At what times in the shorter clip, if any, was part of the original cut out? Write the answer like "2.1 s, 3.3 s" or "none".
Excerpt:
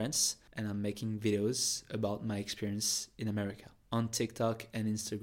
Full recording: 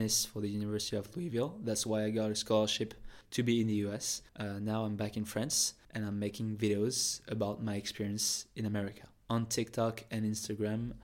none